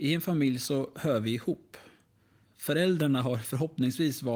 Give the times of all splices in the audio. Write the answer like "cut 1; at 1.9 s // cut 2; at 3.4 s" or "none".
cut 1; at 2.4 s